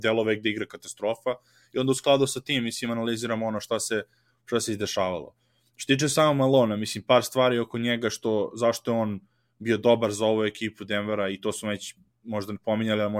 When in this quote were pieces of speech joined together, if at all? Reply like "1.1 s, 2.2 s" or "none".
none